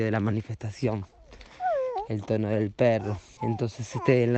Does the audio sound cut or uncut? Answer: cut